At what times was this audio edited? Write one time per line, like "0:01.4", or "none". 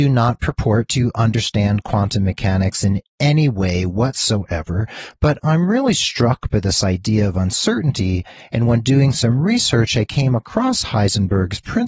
none